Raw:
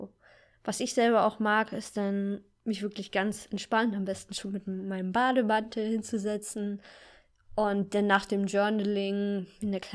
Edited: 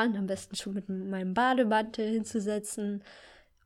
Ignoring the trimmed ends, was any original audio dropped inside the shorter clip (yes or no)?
no